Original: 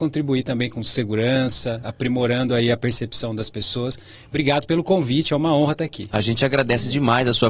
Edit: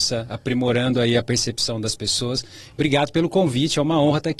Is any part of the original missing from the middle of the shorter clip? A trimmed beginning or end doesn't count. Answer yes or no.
no